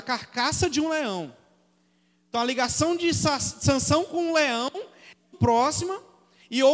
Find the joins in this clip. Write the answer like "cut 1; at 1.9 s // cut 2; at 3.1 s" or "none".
cut 1; at 5.3 s